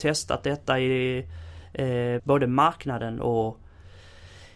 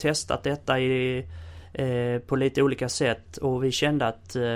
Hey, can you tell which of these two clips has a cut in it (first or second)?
first